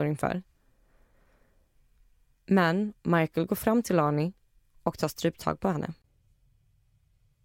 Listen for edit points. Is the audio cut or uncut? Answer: uncut